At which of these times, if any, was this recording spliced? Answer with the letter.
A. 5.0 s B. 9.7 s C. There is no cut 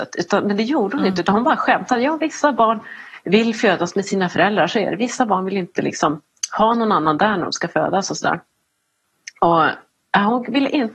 C